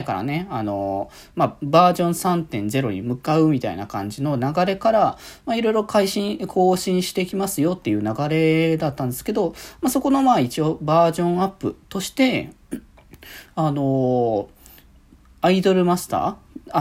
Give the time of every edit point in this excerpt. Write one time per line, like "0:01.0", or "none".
none

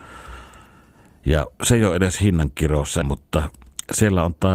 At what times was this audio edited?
0:01.5
0:03.0

